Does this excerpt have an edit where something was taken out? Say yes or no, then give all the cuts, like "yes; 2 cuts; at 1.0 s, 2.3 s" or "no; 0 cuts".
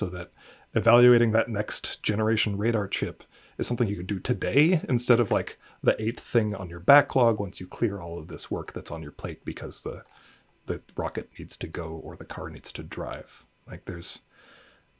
no; 0 cuts